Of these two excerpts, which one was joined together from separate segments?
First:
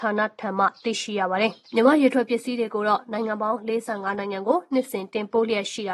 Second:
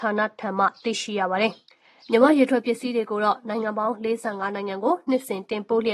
first; 1 cut; at 1.6 s

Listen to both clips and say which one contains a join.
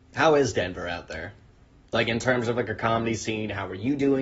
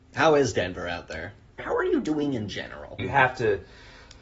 second; 2 cuts; at 1.6 s, 3.0 s

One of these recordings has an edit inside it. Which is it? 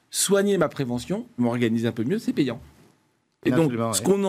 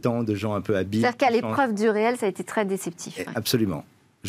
first; 1 cut; at 1.4 s

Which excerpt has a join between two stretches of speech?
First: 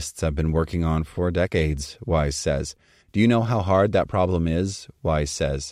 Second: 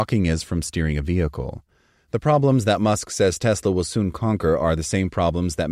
first; 1 cut; at 3.0 s

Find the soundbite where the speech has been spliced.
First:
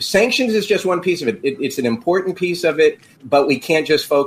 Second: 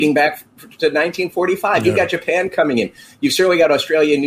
first; 1 cut; at 3.2 s

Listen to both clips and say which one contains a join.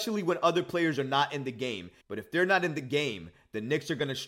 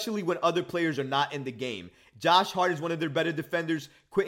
first; 1 cut; at 2.0 s

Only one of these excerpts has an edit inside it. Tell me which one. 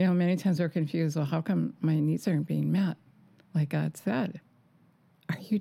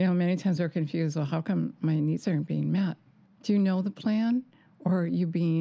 second; 1 cut; at 3.2 s

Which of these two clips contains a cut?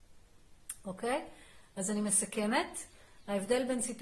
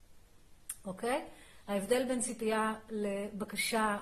second; 1 cut; at 1.6 s

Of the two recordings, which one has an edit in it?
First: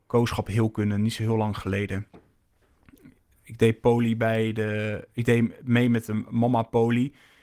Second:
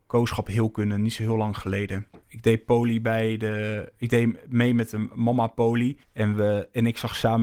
second; 2 cuts; at 2.2 s, 6.0 s

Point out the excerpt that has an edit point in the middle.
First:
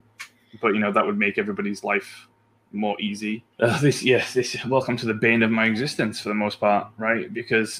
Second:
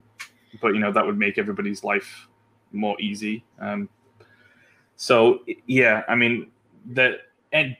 first; 2 cuts; at 3.5 s, 4.6 s

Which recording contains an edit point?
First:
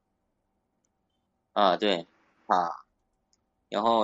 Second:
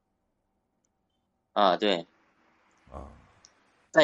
first; 1 cut; at 2.5 s

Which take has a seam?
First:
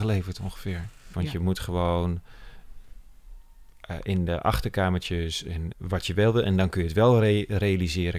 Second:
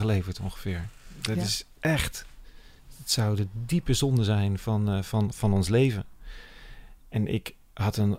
first; 2 cuts; at 1.1 s, 5.7 s

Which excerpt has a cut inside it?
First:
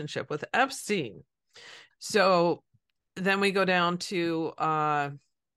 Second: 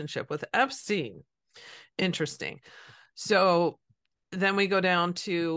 first; 1 cut; at 1.9 s

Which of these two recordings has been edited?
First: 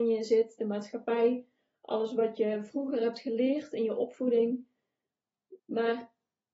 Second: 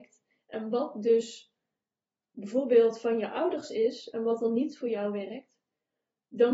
first; 1 cut; at 5.6 s

